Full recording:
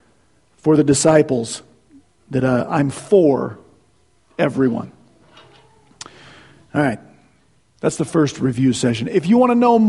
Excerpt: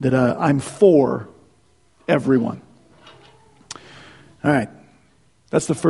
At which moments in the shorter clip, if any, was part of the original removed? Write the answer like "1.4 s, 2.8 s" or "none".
none